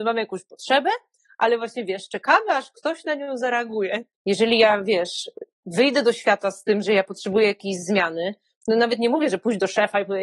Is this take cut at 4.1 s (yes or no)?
yes